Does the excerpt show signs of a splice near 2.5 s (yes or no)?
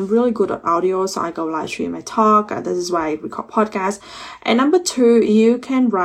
no